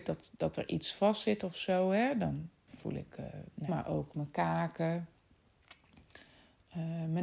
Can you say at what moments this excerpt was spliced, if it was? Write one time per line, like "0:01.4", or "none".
0:02.7
0:03.7

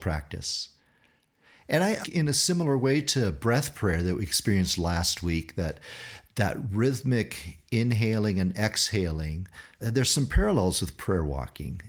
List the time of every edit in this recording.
0:02.0
0:09.8

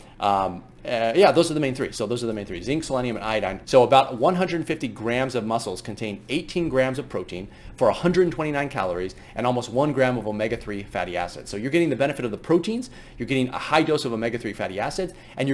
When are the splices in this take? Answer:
0:03.6

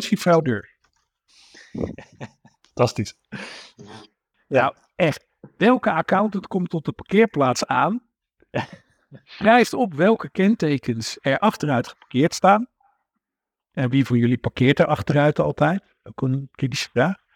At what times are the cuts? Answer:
0:04.3

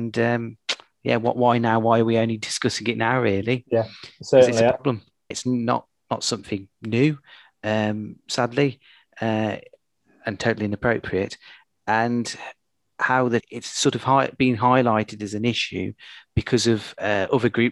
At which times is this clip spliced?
0:05.3
0:13.4

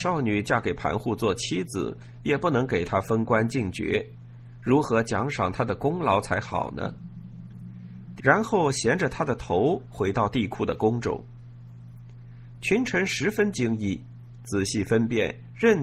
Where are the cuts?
0:08.2

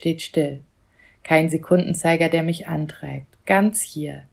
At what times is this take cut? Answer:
none

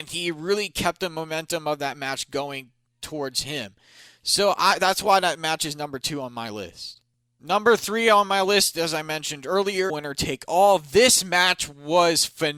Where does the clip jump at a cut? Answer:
0:09.9

